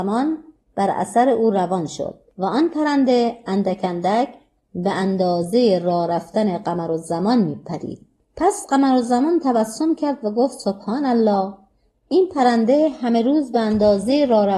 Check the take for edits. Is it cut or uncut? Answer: uncut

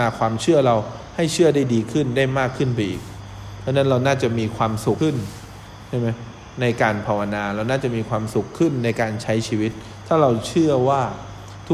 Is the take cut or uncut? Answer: cut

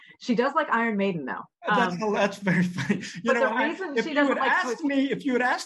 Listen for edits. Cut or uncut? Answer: uncut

